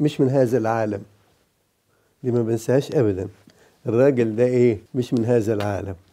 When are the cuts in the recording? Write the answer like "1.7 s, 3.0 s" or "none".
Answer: 4.9 s